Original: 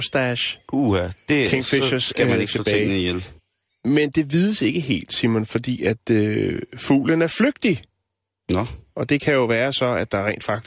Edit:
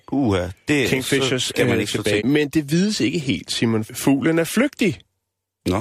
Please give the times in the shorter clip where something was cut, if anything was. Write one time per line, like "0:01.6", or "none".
0:02.2
0:03.9